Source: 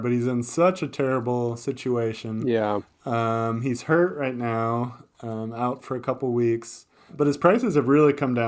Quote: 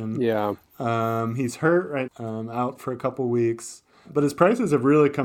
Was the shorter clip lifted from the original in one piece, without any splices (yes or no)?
no